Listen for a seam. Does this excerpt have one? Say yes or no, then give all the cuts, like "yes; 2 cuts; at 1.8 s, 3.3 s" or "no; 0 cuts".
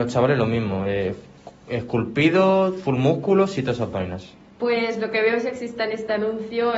yes; 1 cut; at 4.5 s